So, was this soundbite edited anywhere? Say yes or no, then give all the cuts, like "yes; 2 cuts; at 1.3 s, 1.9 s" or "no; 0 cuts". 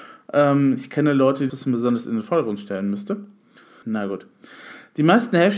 yes; 2 cuts; at 1.5 s, 3.8 s